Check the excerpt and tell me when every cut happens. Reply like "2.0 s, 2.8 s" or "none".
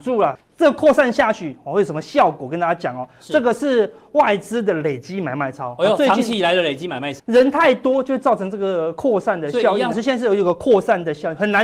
7.2 s, 9.9 s